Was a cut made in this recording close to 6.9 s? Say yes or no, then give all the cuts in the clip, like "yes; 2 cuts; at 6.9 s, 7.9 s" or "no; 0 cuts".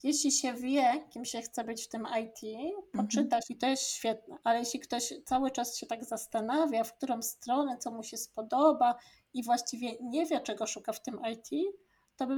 no; 1 cut; at 3.5 s